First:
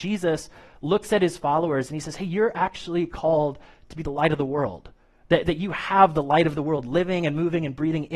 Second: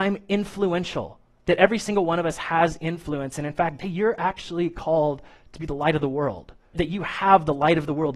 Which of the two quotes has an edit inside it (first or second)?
second